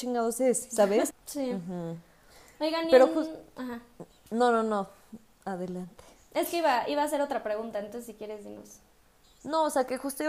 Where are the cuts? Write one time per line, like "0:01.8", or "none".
0:01.1